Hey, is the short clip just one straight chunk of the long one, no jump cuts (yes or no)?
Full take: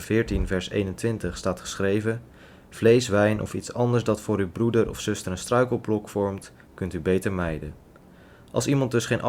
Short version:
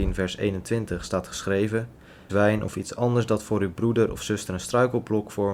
no